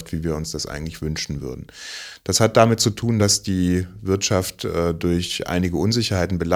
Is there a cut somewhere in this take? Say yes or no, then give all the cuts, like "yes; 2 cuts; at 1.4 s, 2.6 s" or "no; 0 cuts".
no; 0 cuts